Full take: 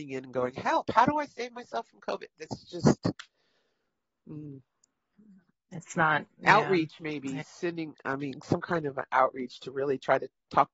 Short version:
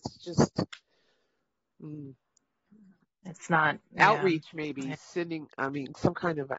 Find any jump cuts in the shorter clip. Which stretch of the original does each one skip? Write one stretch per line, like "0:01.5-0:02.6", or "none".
none